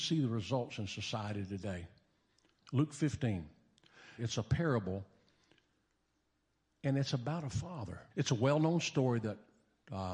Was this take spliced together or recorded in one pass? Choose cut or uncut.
cut